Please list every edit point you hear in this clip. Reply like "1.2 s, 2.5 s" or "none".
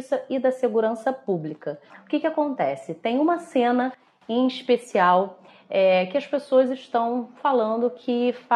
none